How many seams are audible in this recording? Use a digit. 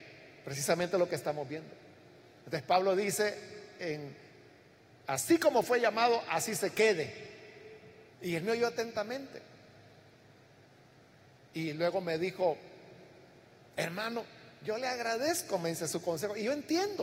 1